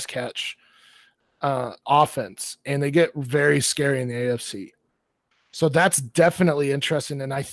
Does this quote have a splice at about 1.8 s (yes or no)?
yes